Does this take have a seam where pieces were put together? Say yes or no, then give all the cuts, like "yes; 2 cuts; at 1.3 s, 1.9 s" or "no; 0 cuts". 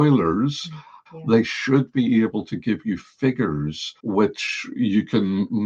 yes; 2 cuts; at 1.1 s, 4.0 s